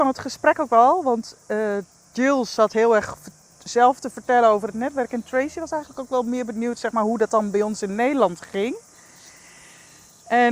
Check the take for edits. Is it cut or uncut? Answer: uncut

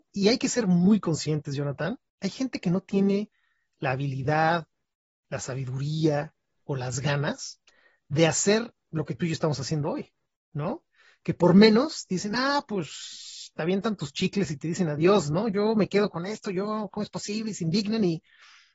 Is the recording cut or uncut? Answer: uncut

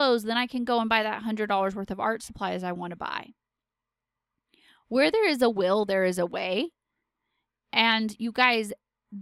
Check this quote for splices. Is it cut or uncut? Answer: uncut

